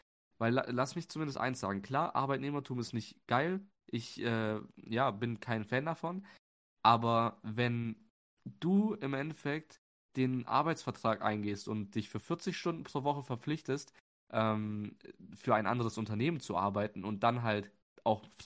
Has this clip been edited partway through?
no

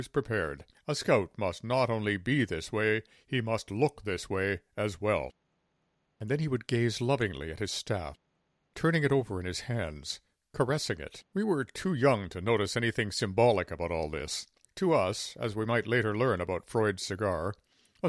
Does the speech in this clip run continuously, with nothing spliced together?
no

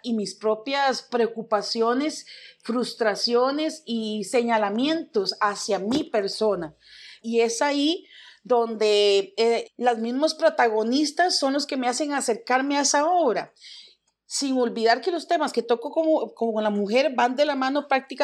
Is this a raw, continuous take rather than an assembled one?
no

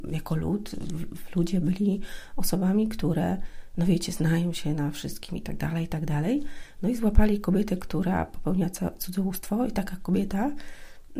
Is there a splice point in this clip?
no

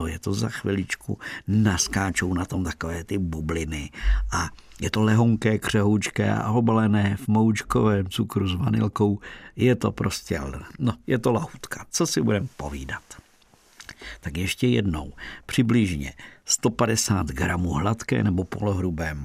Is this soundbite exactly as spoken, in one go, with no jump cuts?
yes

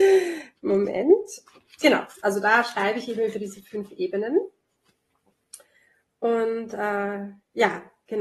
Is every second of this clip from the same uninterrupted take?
yes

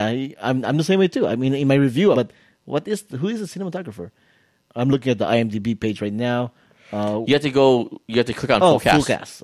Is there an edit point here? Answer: yes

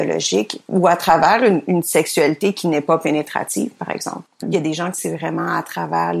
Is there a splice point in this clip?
yes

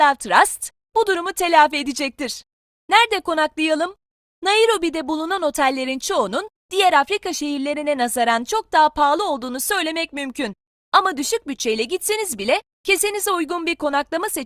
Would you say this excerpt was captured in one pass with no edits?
yes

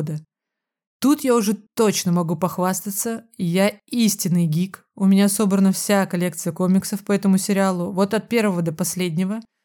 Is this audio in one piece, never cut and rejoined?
yes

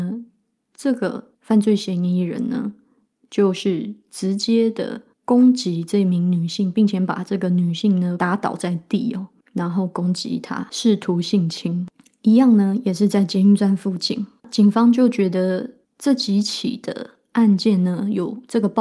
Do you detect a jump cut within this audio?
no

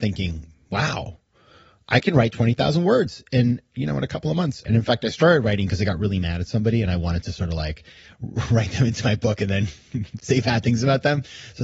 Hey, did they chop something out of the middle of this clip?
yes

